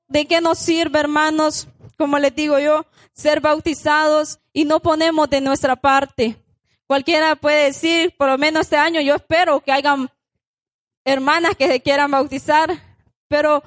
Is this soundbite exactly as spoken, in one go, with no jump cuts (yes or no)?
yes